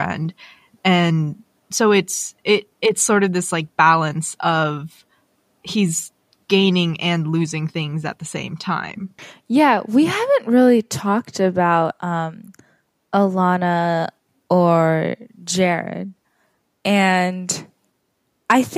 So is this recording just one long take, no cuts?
yes; 0 cuts

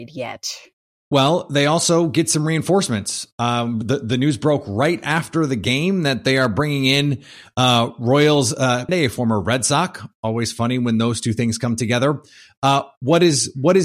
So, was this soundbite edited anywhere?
yes; 2 cuts; at 0.9 s, 8.9 s

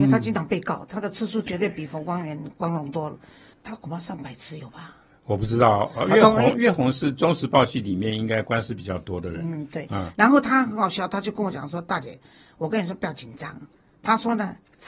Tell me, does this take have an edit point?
no; 0 cuts

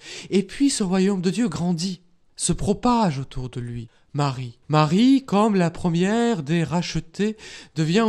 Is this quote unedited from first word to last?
yes; 0 cuts

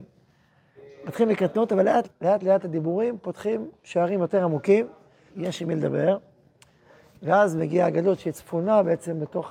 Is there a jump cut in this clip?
yes; 2 cuts; at 2.0 s, 5.3 s

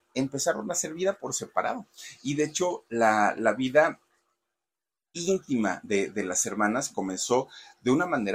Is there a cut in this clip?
no; 0 cuts

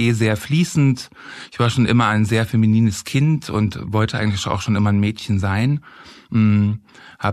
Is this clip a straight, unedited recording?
yes; 0 cuts

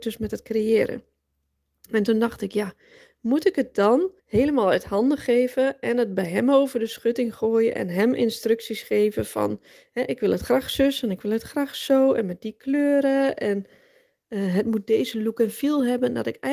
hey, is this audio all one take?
no; 1 cut; at 4.2 s

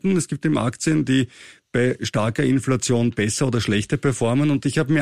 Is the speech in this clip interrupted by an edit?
no; 0 cuts

